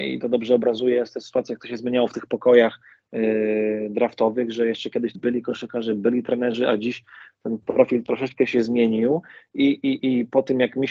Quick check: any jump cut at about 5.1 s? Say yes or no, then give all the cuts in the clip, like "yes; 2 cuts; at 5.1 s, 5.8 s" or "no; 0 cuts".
yes; 1 cut; at 5.1 s